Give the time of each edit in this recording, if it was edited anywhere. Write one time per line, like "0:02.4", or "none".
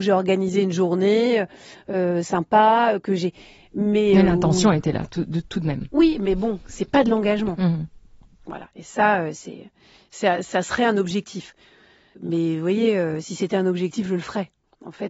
none

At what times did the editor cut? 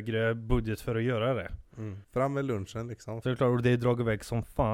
0:02.0
0:03.2

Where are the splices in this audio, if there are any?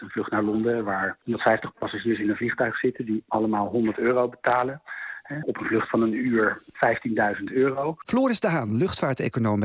0:05.4
0:08.0

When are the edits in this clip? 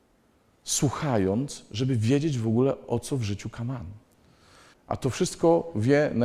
0:04.7

